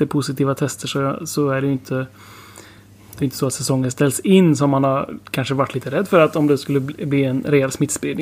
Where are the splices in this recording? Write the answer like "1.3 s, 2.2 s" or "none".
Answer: none